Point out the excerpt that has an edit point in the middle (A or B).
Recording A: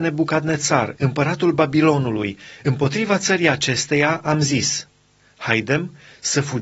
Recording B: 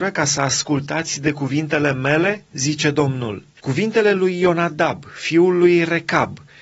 B